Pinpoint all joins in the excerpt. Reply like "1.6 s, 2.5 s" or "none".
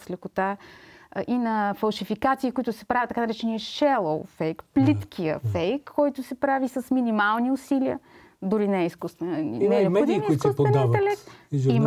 none